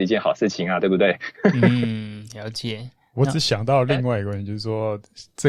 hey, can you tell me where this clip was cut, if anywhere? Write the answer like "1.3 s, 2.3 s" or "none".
none